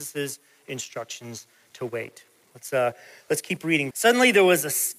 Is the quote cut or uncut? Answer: cut